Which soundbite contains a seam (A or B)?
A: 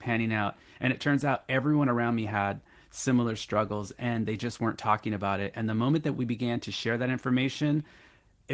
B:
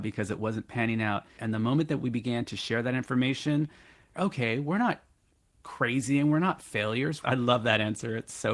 B